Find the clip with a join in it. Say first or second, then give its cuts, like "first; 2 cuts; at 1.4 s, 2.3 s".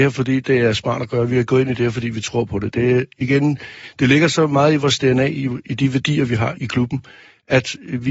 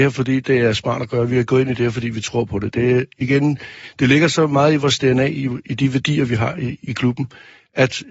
first; 1 cut; at 6.5 s